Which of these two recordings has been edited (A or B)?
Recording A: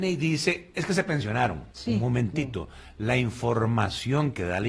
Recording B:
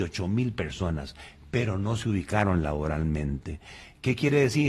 A